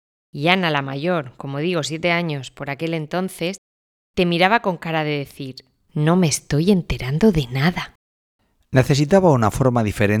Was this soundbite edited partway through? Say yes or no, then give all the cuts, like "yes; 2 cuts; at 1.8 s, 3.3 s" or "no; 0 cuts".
no; 0 cuts